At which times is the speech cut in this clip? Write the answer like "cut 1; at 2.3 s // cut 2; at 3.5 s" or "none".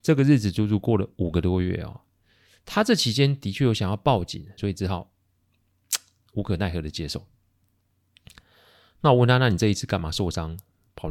cut 1; at 4.6 s